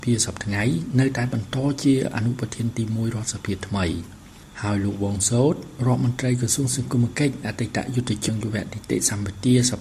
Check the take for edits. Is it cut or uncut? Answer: cut